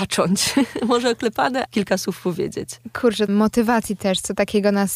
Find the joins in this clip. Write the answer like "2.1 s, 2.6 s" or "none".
1.7 s, 3.3 s